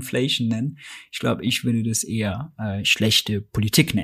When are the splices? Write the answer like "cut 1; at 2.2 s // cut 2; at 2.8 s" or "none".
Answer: none